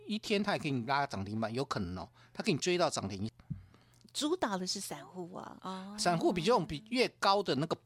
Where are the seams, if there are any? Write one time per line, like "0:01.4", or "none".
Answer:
0:03.3
0:05.6